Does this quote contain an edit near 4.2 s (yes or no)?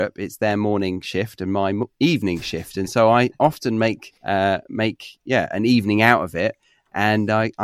yes